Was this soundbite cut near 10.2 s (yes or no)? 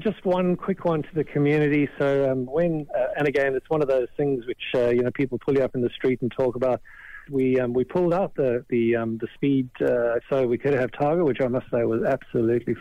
yes